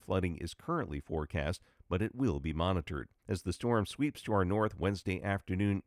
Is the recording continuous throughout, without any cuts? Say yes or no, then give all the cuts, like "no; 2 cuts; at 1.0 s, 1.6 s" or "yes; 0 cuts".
no; 1 cut; at 3.2 s